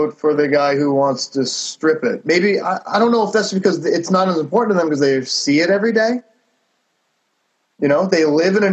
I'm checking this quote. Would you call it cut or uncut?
uncut